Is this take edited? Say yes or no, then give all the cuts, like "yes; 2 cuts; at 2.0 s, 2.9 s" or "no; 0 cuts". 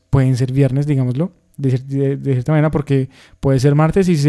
no; 0 cuts